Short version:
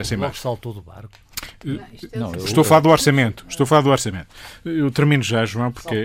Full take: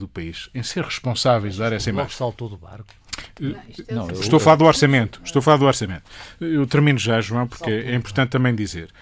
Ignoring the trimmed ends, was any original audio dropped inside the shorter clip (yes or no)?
no